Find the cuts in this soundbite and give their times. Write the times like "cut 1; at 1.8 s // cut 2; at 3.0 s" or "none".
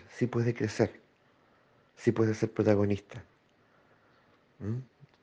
none